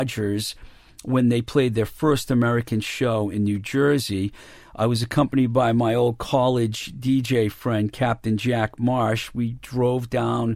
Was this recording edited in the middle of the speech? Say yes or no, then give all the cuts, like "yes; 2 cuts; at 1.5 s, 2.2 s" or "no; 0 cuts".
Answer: no; 0 cuts